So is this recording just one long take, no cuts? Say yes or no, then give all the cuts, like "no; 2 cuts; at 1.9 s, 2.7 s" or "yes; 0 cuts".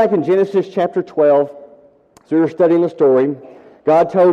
yes; 0 cuts